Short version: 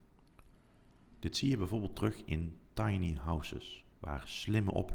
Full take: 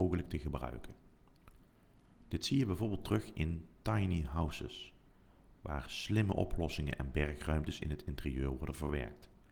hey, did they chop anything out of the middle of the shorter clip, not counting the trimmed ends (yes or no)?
yes